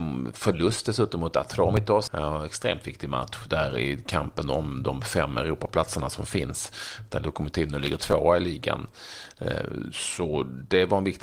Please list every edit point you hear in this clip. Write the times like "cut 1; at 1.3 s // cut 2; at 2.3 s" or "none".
cut 1; at 2.1 s